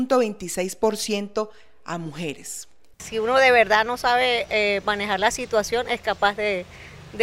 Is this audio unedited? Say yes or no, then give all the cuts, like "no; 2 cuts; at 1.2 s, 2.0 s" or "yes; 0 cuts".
no; 1 cut; at 2.9 s